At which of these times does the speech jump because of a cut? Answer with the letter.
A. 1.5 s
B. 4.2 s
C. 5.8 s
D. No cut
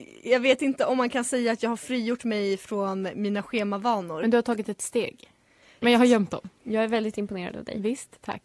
C